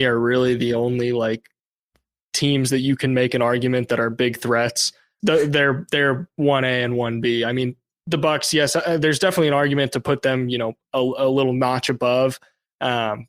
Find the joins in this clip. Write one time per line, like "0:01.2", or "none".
0:05.2